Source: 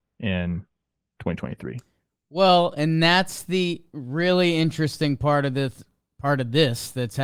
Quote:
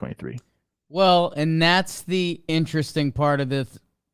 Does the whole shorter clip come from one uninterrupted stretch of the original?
no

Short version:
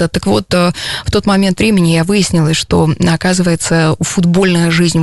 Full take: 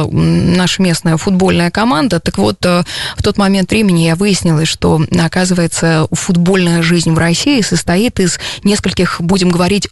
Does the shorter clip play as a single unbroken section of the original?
yes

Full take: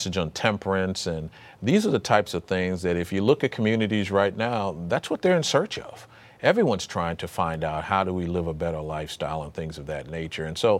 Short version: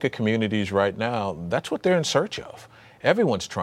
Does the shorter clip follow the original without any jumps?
yes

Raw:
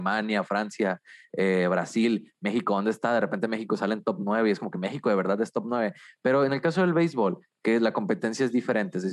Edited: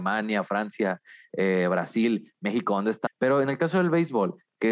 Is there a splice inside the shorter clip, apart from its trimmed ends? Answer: yes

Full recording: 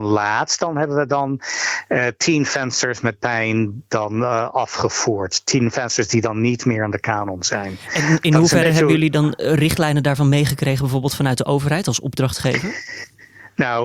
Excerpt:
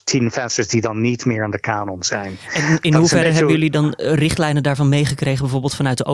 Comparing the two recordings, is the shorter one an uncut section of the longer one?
yes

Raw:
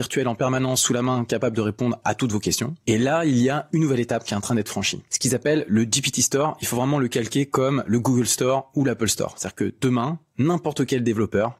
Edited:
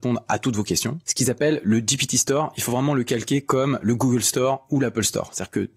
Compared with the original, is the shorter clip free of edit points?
no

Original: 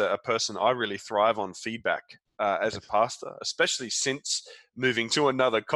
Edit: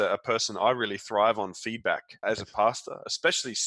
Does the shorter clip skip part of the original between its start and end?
yes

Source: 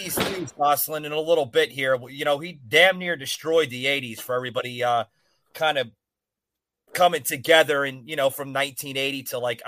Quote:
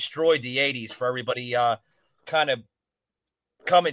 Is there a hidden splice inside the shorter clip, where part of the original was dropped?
no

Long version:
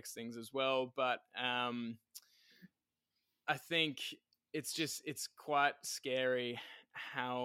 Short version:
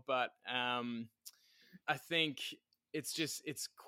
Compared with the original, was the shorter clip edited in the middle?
yes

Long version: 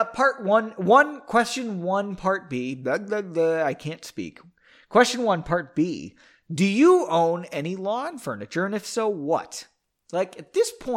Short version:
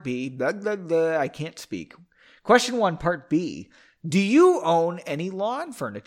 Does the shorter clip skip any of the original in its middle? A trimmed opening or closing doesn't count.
no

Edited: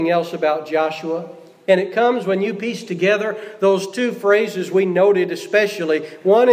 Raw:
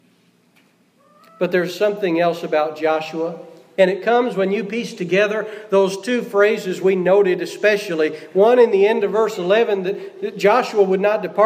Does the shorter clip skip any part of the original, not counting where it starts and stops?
no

